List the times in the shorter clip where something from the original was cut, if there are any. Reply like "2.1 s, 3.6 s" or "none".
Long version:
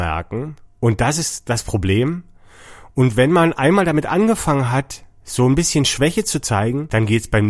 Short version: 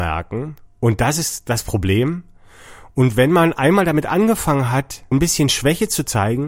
5.1 s

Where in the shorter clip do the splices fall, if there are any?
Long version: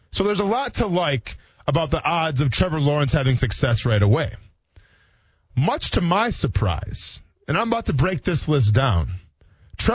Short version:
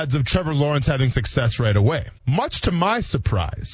2.2 s

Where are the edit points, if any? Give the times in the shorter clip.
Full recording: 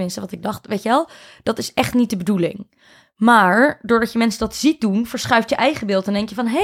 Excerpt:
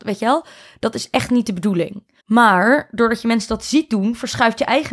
2.2 s

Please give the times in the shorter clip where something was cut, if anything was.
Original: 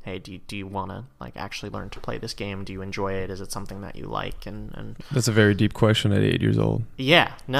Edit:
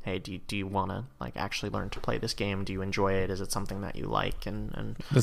none

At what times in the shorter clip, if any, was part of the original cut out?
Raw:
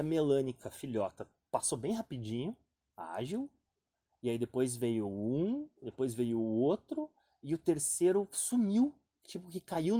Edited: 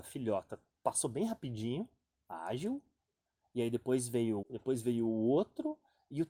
4.4 s

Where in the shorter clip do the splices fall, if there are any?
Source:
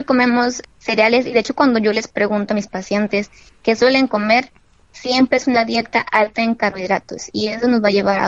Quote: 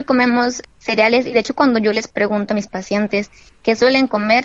none

